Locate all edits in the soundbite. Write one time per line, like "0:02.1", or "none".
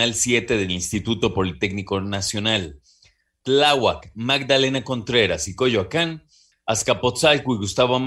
0:06.5